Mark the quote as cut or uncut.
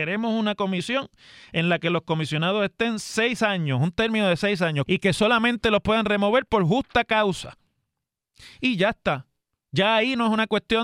cut